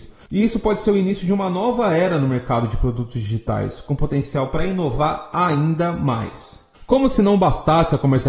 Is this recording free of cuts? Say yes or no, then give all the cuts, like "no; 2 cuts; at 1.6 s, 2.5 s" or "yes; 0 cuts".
yes; 0 cuts